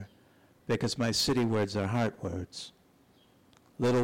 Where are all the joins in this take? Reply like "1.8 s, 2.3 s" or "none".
none